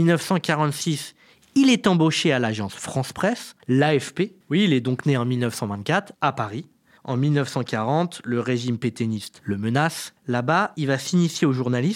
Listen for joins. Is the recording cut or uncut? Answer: cut